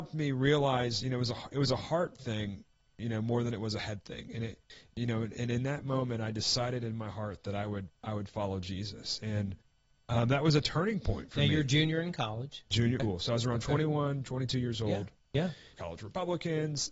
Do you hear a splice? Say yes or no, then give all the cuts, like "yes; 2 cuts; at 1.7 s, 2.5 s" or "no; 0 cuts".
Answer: yes; 2 cuts; at 13.0 s, 15.7 s